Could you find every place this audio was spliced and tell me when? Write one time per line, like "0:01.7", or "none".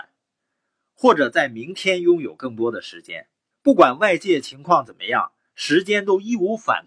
0:03.5